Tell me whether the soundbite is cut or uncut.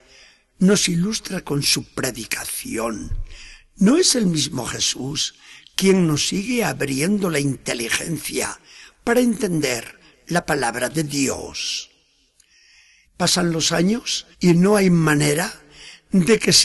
cut